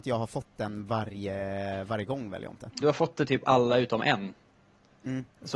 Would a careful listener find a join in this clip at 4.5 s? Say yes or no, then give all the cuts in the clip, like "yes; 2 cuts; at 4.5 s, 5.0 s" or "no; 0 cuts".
no; 1 cut; at 2.8 s